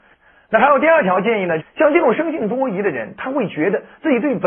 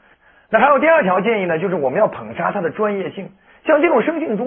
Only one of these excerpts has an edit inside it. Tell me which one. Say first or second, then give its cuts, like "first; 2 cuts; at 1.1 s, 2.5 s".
first; 1 cut; at 1.6 s